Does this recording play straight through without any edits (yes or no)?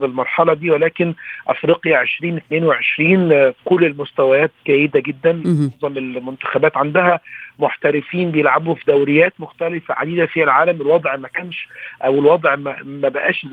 yes